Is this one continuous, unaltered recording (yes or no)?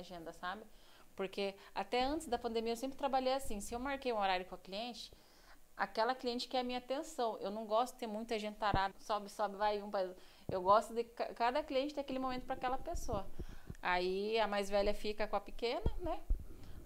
no